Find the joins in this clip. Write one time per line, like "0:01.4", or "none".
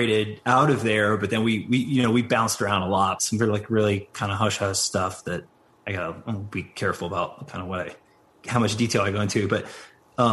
0:03.2